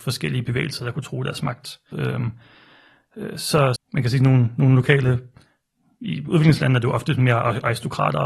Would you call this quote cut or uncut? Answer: cut